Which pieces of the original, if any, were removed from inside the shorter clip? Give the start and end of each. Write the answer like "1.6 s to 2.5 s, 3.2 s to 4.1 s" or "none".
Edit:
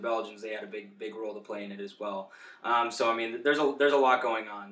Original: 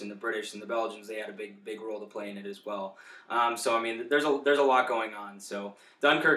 none